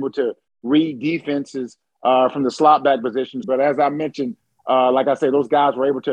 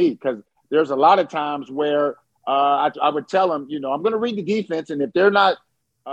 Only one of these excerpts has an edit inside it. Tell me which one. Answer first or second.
first